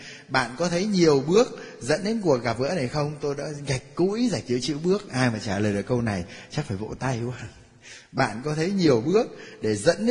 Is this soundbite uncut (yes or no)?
yes